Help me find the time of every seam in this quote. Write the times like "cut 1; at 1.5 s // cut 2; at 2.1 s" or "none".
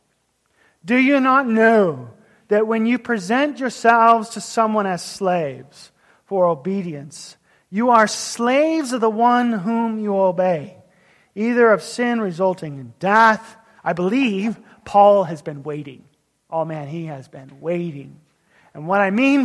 cut 1; at 13.8 s